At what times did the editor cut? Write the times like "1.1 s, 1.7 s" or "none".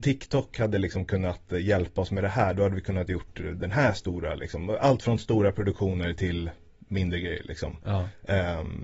none

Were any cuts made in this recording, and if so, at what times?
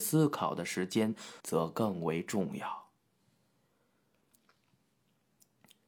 1.4 s

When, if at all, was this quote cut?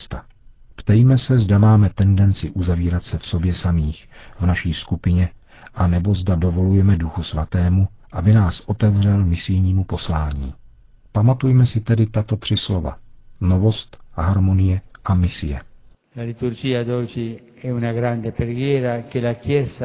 none

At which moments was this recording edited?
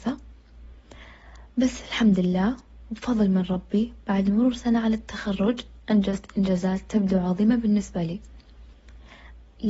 none

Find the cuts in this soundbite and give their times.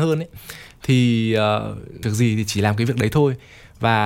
2.0 s

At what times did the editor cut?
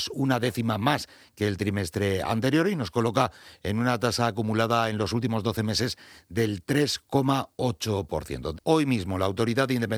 8.5 s

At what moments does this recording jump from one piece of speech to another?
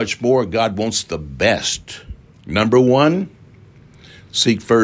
2.3 s

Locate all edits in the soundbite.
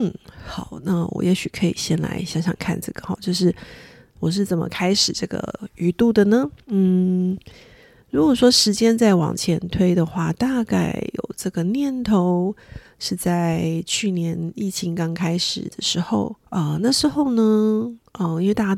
6.6 s, 16.5 s

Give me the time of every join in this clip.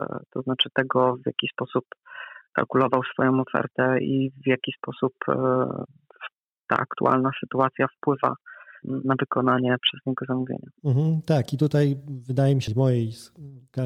8.8 s, 10.8 s, 12.7 s

